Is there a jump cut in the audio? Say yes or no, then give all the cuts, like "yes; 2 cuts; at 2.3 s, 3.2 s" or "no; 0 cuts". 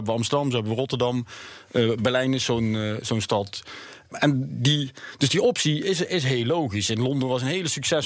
no; 0 cuts